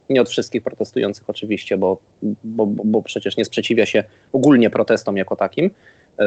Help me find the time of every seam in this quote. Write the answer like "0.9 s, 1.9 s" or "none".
none